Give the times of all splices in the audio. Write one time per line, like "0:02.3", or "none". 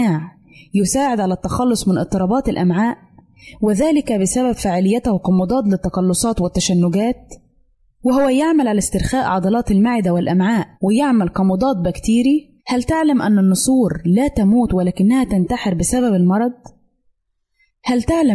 0:10.7
0:12.6